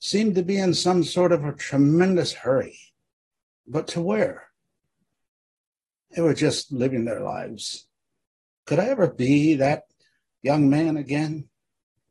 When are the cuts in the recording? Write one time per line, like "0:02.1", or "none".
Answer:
0:08.6

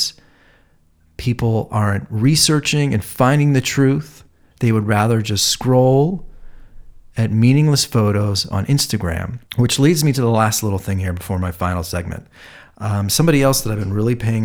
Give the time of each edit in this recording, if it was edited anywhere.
0:04.5
0:09.5

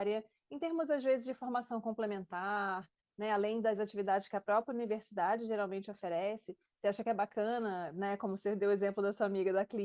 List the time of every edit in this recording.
none

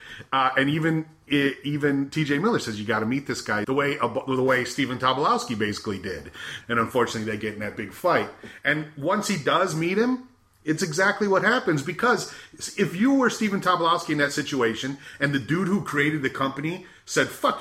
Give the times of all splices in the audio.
0:03.6
0:06.6

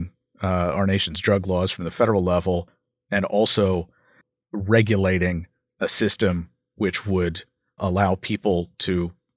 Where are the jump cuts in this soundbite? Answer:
0:07.8

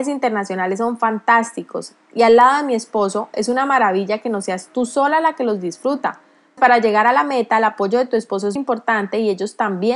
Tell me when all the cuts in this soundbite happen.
0:06.6
0:08.6

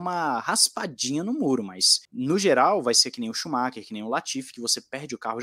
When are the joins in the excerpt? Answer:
0:02.1

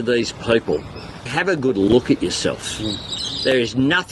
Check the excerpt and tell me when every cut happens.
0:01.3

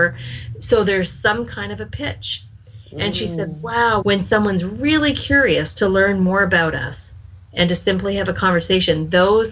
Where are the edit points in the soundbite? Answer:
0:04.0

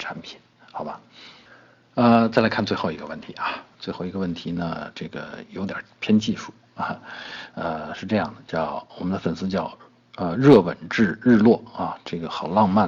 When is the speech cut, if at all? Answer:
none

